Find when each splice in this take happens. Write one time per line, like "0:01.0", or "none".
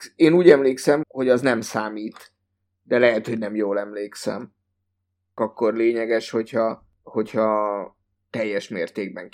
0:01.0